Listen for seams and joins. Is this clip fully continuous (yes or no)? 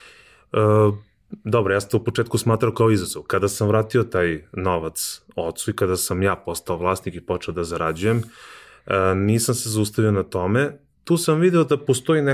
yes